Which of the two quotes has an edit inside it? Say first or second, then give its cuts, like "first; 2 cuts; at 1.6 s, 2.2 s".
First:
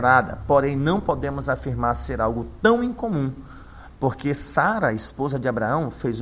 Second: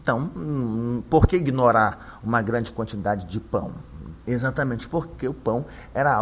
second; 1 cut; at 4.2 s